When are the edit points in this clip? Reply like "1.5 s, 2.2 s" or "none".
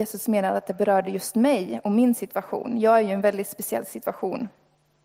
none